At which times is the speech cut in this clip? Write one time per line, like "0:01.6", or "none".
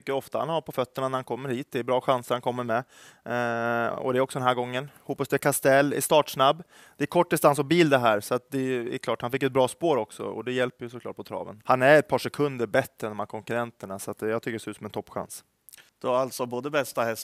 0:11.6
0:15.9